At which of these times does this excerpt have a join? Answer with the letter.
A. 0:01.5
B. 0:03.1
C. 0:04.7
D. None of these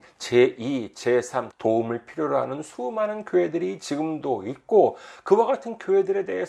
A